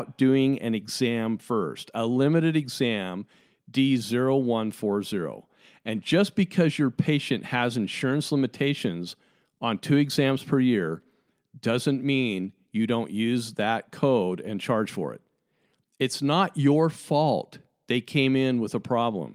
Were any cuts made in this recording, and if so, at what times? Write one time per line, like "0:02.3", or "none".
none

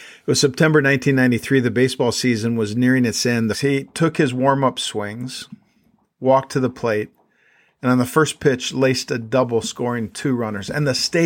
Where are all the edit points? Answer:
0:03.5

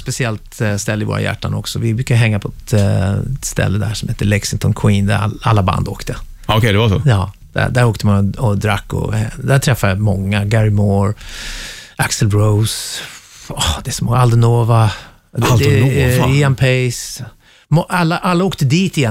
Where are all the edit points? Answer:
none

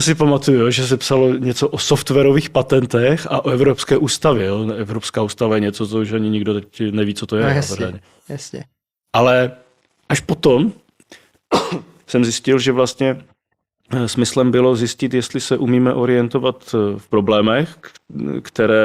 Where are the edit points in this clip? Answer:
none

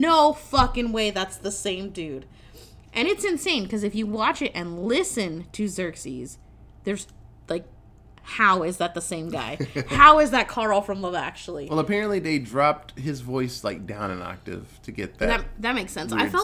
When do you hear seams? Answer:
none

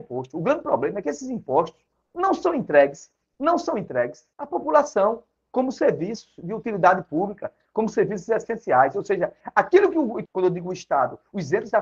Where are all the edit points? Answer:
0:04.3
0:10.2

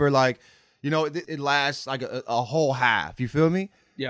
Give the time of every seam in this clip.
0:01.2

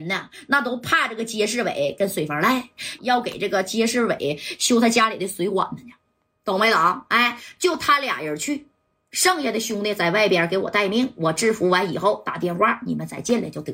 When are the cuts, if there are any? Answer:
0:03.0

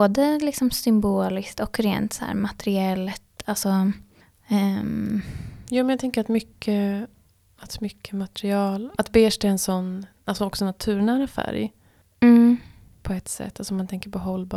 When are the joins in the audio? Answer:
none

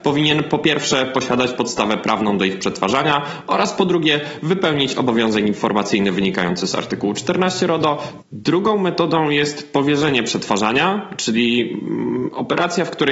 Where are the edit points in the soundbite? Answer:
0:08.2

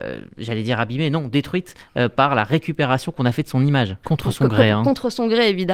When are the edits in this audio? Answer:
0:04.0

